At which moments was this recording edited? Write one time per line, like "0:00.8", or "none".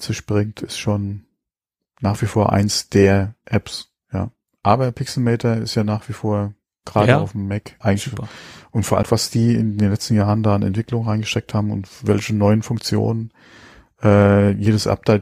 0:04.5
0:07.8
0:09.0